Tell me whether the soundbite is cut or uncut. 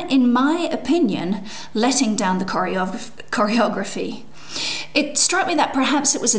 uncut